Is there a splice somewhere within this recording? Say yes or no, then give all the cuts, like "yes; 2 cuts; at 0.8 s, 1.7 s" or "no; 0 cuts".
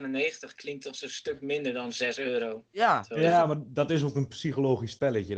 no; 0 cuts